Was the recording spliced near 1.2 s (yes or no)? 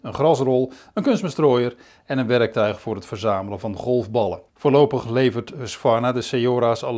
no